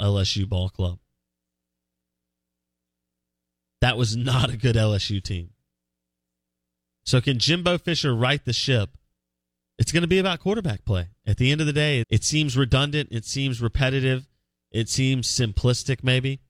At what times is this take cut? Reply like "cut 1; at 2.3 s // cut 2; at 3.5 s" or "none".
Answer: cut 1; at 12.0 s